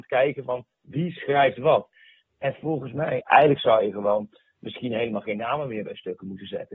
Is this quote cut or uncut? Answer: cut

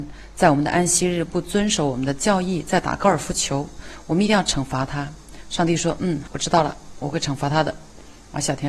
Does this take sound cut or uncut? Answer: cut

